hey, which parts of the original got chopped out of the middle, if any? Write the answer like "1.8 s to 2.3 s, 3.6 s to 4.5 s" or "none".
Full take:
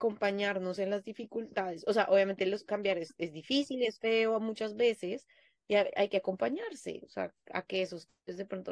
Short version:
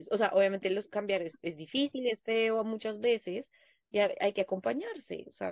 none